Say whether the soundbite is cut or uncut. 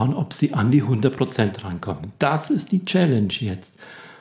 uncut